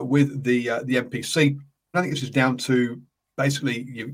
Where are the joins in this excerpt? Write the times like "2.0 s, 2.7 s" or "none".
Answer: 1.9 s